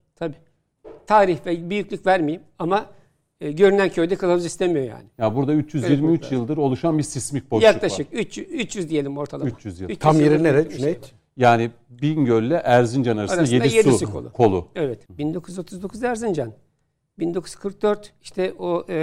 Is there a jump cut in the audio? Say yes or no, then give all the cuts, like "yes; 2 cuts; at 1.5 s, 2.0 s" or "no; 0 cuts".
yes; 1 cut; at 15.0 s